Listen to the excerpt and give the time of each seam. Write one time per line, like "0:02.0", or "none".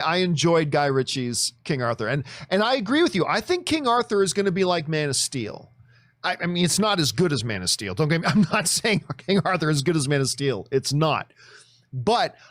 none